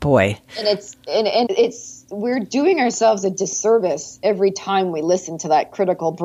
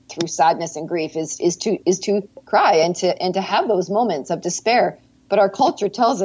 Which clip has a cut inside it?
first; 1 cut; at 1.5 s

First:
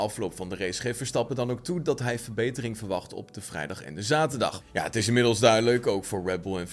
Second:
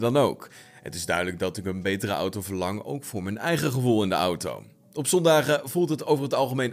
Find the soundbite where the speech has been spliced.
first; 1 cut; at 4.6 s

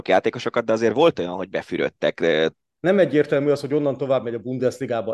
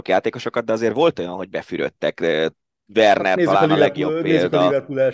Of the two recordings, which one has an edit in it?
first; 1 cut; at 2.8 s

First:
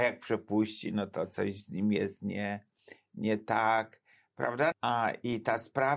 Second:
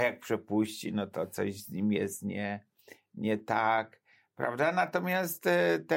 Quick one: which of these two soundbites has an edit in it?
first; 1 cut; at 4.7 s

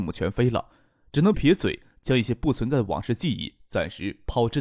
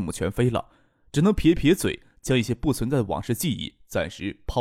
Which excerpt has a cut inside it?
first; 1 cut; at 1.3 s

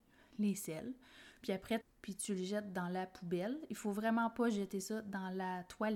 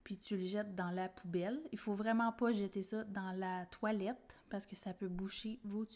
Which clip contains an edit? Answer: first; 1 cut; at 1.8 s

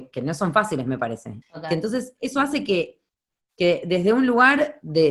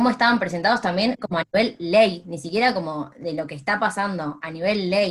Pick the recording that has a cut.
first; 1 cut; at 1.4 s

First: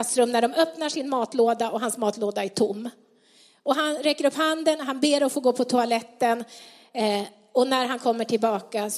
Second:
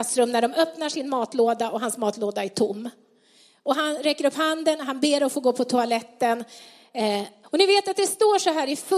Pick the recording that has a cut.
second; 1 cut; at 7.4 s

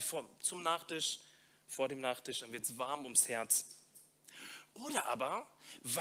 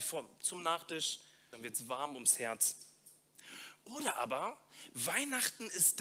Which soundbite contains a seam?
second; 1 cut; at 1.5 s

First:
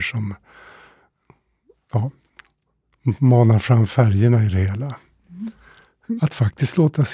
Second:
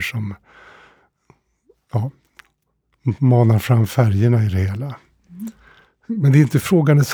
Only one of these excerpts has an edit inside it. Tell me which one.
first; 1 cut; at 6.2 s

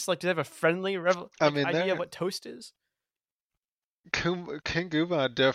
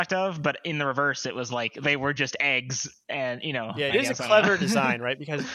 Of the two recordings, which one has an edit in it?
second; 1 cut; at 3.9 s

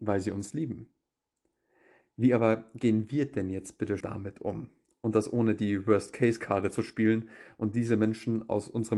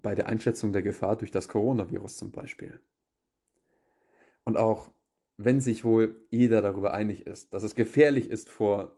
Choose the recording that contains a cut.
first; 1 cut; at 4.0 s

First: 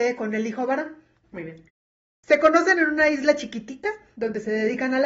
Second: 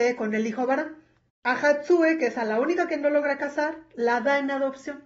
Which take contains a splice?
first; 1 cut; at 1.2 s

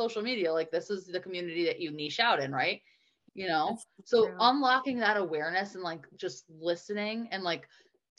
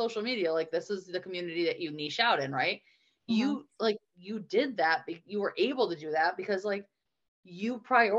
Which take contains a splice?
first; 1 cut; at 3.3 s

